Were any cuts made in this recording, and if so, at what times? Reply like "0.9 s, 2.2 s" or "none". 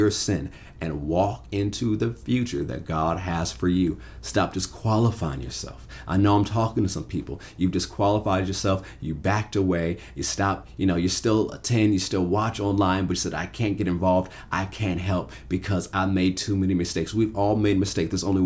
none